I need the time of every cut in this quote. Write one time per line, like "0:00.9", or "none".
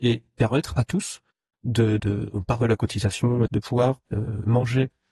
0:02.0
0:03.5